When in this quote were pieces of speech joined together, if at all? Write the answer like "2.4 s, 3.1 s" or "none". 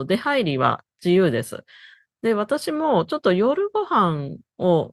none